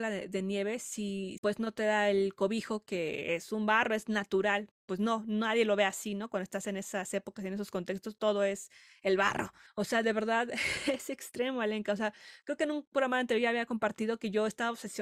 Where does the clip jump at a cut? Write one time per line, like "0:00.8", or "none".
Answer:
0:01.4
0:09.7